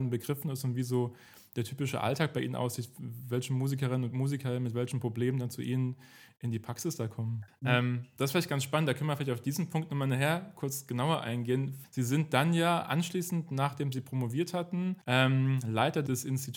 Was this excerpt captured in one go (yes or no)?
no